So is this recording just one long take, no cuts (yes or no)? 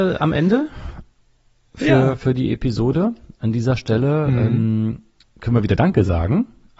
yes